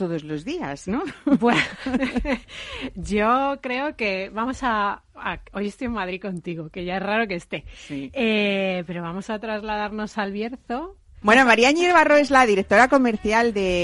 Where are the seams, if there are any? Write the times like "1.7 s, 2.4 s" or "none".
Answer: 11.2 s